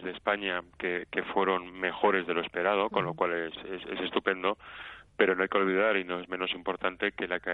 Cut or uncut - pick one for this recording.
uncut